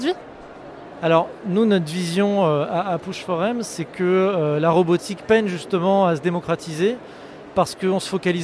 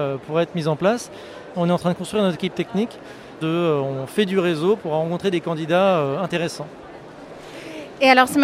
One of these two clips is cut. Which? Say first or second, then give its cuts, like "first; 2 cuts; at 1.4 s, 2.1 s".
second; 2 cuts; at 1.5 s, 3.4 s